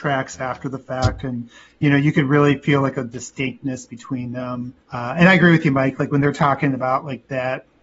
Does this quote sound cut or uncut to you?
cut